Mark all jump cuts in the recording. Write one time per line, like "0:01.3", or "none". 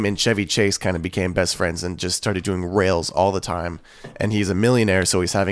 none